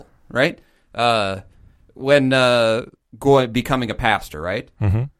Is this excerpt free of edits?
no; 1 cut; at 3.0 s

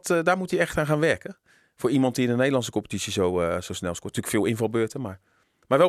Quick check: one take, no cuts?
yes; 0 cuts

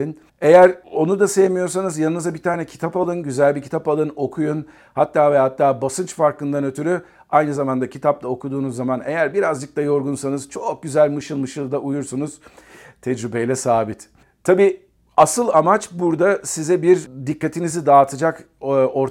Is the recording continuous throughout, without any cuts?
yes; 0 cuts

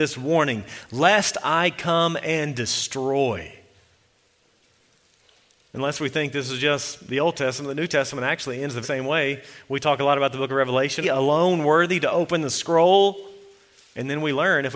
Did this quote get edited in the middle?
yes; 2 cuts; at 8.8 s, 11.0 s

